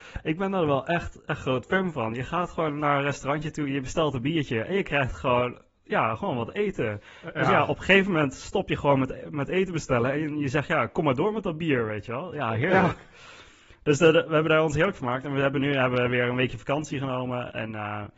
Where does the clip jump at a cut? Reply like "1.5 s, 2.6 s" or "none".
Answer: none